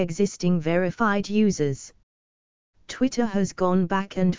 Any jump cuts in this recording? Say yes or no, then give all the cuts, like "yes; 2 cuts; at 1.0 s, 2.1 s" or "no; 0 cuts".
no; 0 cuts